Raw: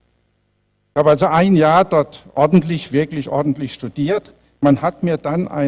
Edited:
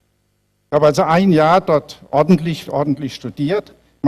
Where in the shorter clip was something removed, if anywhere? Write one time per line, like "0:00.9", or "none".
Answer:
0:02.6